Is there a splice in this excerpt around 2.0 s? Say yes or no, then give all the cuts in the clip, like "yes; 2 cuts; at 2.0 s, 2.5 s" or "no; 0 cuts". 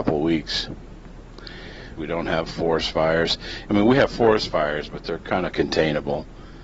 yes; 2 cuts; at 2.0 s, 3.7 s